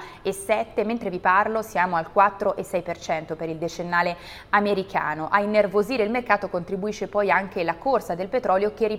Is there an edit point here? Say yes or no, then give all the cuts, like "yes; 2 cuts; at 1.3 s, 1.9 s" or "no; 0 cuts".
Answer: no; 0 cuts